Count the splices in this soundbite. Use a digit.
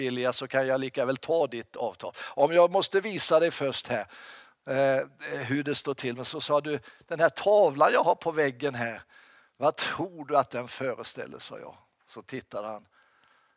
0